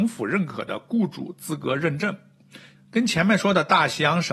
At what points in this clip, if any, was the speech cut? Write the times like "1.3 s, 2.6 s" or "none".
2.8 s

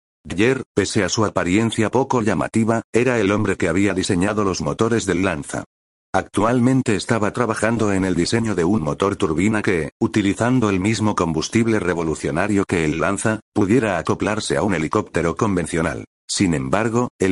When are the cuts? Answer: 16.1 s

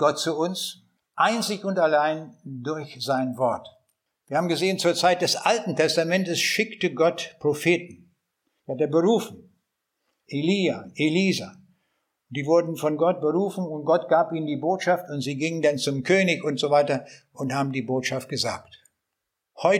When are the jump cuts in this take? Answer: 1.0 s

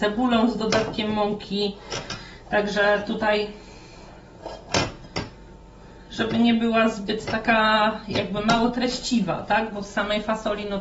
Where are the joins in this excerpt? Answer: none

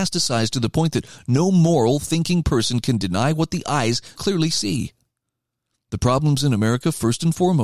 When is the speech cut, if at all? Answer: 4.2 s

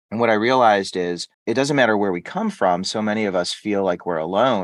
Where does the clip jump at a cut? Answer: 1.3 s

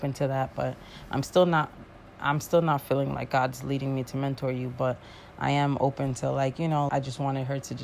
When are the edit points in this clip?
6.9 s

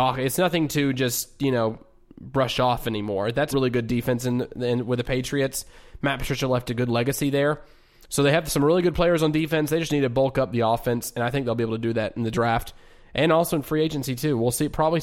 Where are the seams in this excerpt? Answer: 3.5 s

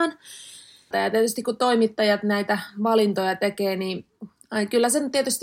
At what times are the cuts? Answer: 0.9 s

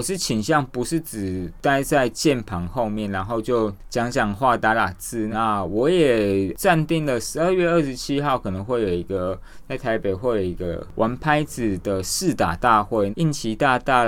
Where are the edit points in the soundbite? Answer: 5.3 s, 13.1 s

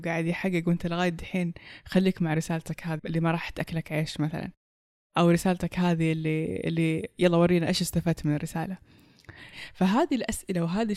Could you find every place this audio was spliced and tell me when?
3.0 s

